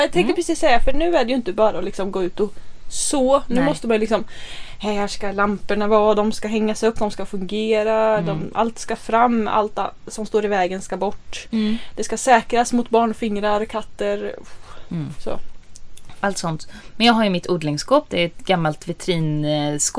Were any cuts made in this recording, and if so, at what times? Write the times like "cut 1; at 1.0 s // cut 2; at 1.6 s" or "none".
cut 1; at 7.0 s